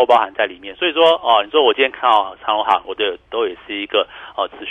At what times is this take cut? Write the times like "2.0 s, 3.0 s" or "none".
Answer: 2.8 s